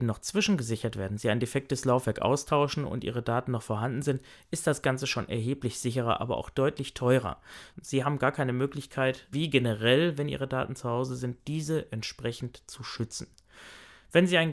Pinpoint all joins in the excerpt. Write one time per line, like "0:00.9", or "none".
0:07.7